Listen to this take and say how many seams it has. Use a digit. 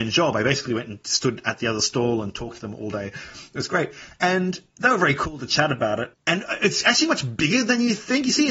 1